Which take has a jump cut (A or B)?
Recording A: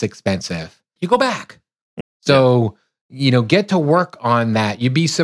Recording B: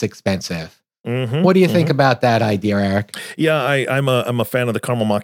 A